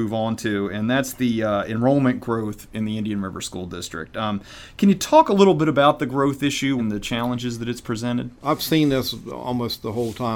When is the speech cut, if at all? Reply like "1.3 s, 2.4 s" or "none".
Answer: 6.8 s, 8.4 s

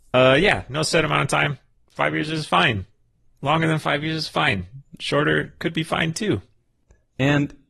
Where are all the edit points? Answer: none

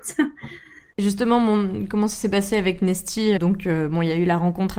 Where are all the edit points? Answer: 0.9 s, 3.4 s

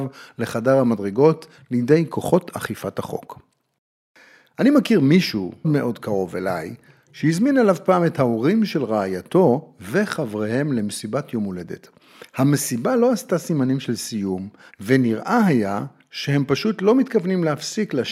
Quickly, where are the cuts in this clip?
5.6 s, 14.7 s

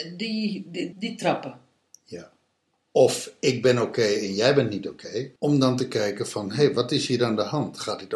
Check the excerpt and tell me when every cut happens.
0.9 s, 2.7 s, 5.4 s

